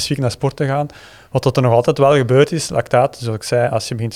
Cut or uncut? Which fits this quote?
uncut